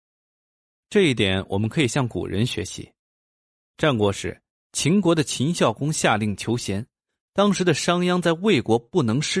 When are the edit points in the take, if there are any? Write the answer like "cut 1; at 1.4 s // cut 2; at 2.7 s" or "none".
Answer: none